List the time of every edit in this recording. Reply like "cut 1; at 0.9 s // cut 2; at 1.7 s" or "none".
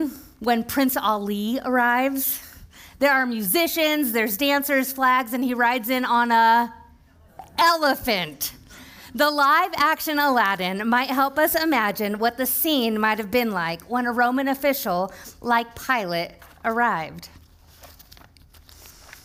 none

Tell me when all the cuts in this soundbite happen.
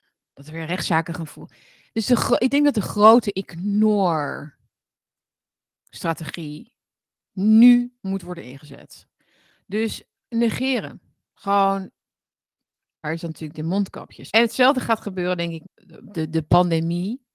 cut 1; at 13.0 s // cut 2; at 14.3 s // cut 3; at 15.6 s

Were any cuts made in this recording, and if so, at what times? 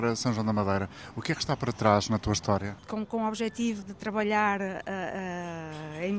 cut 1; at 2.8 s // cut 2; at 3.8 s

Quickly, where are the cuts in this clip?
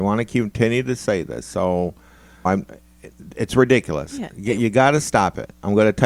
cut 1; at 2.5 s

